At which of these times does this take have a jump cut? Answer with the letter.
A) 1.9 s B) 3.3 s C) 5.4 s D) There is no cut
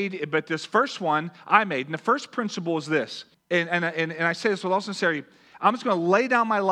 B